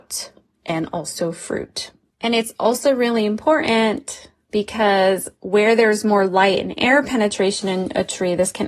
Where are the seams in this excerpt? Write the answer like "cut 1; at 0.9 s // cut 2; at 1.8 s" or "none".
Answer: cut 1; at 2.1 s